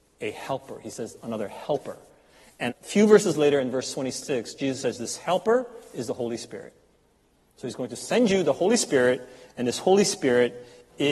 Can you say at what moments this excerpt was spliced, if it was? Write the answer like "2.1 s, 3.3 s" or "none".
2.7 s